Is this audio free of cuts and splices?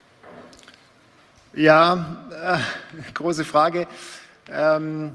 yes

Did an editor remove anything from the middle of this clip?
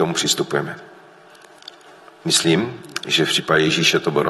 no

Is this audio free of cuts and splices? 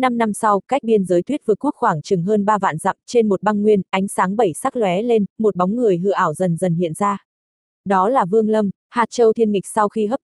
yes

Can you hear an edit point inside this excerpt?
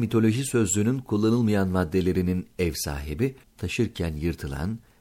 yes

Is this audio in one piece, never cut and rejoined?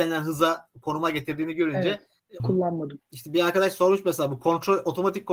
no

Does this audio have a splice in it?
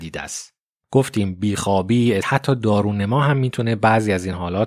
yes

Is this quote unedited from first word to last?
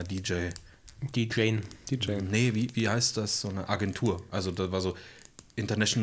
yes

